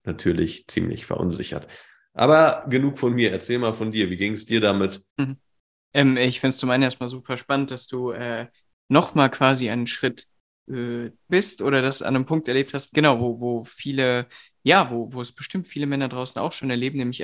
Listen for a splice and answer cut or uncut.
cut